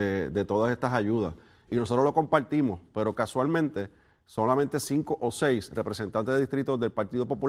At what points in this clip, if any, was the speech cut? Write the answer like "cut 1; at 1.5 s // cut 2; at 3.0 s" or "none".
cut 1; at 1.7 s

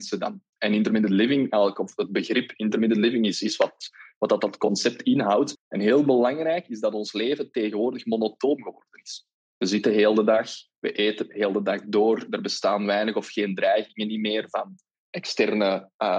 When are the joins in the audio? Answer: cut 1; at 5.6 s

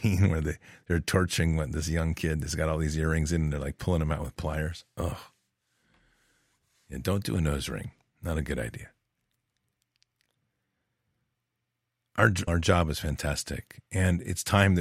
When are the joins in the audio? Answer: cut 1; at 12.5 s

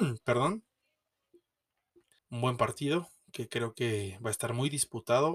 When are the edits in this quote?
cut 1; at 2.2 s

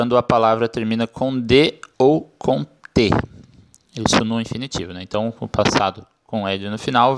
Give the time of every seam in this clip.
cut 1; at 1.9 s

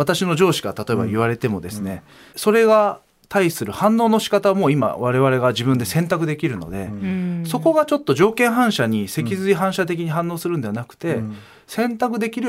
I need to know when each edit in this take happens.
cut 1; at 2.3 s

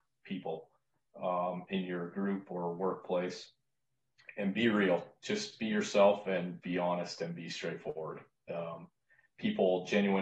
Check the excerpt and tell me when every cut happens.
none

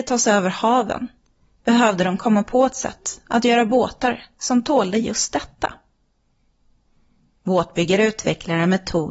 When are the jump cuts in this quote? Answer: none

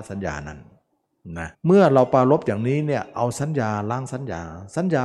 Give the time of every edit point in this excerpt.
cut 1; at 1.5 s

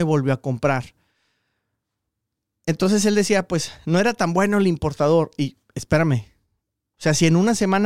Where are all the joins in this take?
cut 1; at 6.9 s

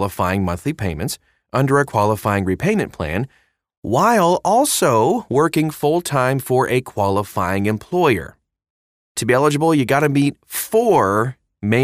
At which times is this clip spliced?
cut 1; at 9.0 s

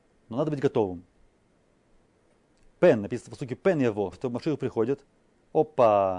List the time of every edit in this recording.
cut 1; at 4.1 s

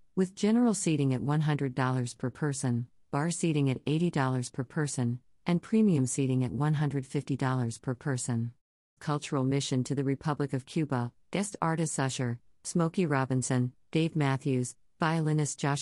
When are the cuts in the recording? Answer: cut 1; at 9.0 s // cut 2; at 11.2 s

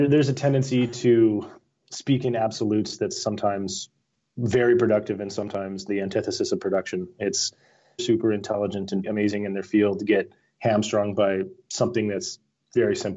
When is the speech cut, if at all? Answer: cut 1; at 8.0 s // cut 2; at 9.0 s

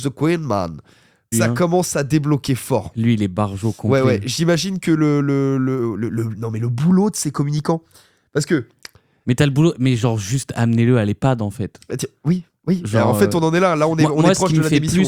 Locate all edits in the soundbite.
cut 1; at 1.3 s

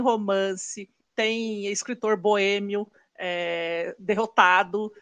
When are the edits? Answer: none

